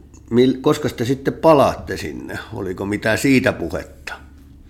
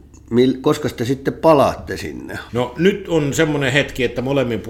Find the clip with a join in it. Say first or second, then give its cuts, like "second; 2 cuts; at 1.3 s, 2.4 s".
second; 1 cut; at 2.5 s